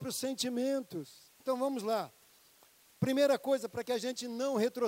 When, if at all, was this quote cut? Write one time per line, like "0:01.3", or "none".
0:01.4